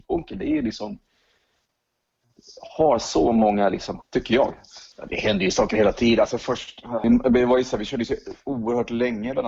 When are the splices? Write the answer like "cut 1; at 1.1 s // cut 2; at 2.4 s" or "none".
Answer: cut 1; at 4.0 s